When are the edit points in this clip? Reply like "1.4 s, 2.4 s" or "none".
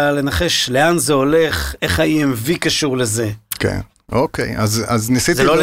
none